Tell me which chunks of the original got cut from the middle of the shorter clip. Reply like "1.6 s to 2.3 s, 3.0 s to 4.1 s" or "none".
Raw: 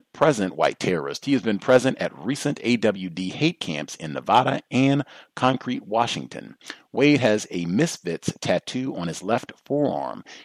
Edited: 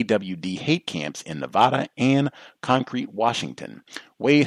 none

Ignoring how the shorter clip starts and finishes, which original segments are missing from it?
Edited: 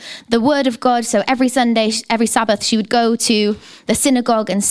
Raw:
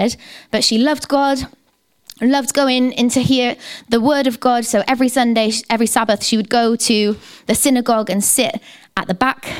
none

